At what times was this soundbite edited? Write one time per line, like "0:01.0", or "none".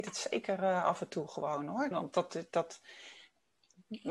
0:01.9